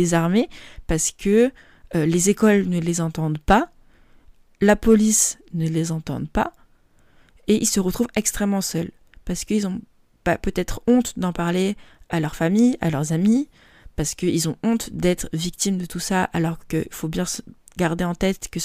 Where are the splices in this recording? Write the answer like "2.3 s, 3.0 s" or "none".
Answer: none